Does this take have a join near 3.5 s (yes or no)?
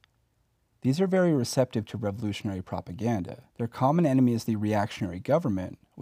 yes